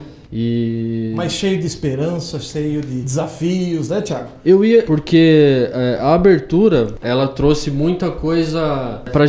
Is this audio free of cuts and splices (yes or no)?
no